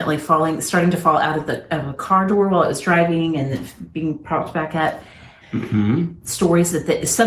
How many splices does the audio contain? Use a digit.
1